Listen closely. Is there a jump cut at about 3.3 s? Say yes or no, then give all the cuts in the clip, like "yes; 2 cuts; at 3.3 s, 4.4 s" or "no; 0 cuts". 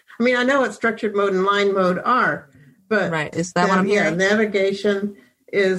yes; 1 cut; at 3.3 s